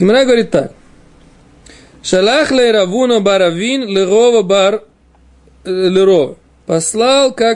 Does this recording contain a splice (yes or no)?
no